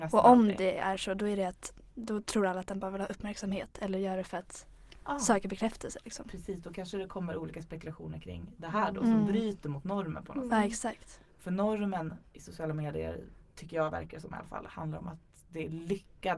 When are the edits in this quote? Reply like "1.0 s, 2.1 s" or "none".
none